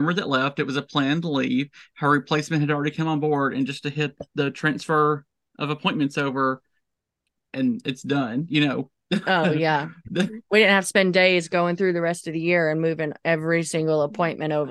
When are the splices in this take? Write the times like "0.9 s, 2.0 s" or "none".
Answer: none